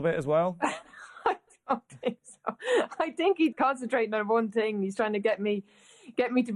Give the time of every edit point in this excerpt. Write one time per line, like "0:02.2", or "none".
0:03.5

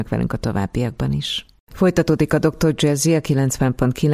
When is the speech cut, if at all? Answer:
none

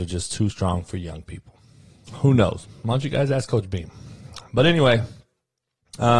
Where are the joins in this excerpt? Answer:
none

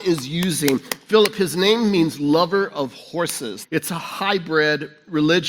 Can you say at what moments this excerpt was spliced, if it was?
0:03.6

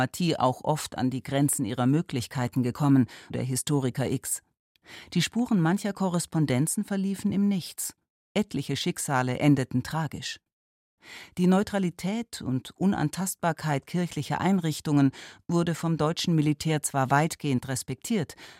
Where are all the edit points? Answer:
0:03.3

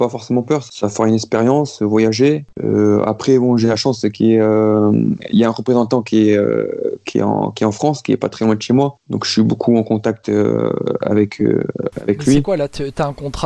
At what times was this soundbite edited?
none

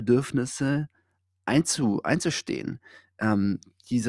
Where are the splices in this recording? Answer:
none

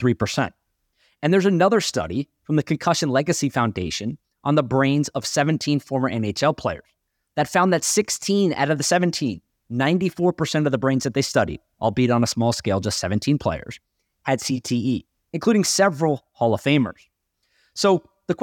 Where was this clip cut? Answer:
none

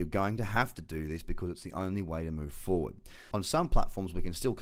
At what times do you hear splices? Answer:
0:03.3

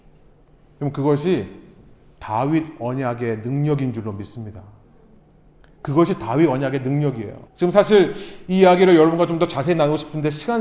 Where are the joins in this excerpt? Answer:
0:07.5

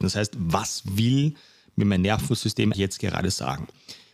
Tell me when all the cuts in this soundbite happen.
0:02.7

